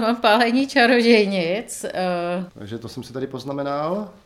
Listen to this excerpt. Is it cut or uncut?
cut